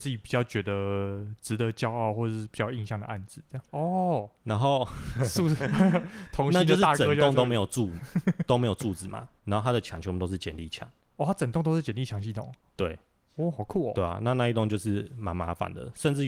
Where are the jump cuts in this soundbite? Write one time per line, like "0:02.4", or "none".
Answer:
0:03.7